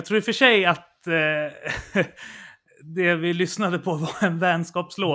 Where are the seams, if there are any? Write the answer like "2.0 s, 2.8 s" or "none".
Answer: none